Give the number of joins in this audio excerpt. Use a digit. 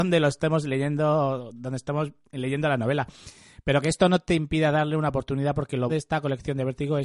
1